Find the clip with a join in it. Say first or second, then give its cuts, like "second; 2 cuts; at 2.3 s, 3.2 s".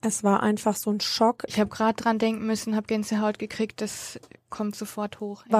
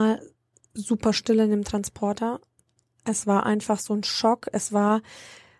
first; 1 cut; at 1.5 s